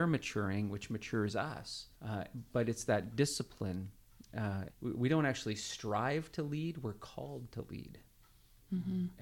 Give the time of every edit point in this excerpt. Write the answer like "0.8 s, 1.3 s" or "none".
1.9 s, 4.7 s

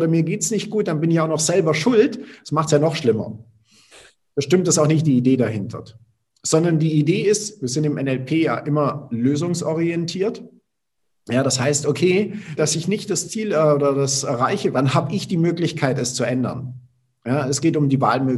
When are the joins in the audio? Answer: 12.6 s, 14.7 s

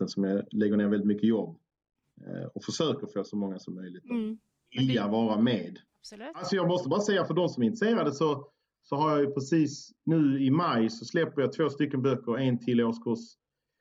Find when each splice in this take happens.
5.9 s

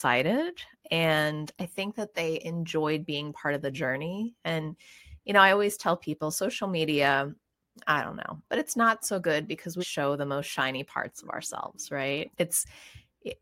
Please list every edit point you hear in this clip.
8.4 s, 9.8 s, 12.3 s

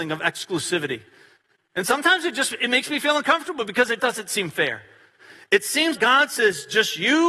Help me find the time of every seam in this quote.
4.0 s, 5.9 s

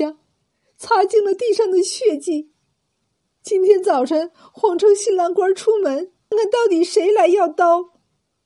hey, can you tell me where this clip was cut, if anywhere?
6.3 s

